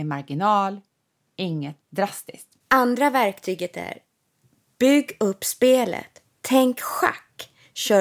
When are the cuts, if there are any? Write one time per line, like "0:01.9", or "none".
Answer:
0:02.6